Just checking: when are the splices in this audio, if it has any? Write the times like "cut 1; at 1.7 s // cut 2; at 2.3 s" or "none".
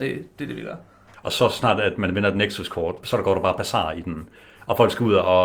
cut 1; at 1.1 s // cut 2; at 3.0 s